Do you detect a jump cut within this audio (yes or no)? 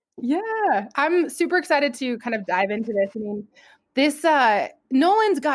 no